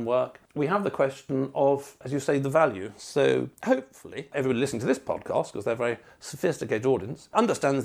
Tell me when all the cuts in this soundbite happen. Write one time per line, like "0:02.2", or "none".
0:03.5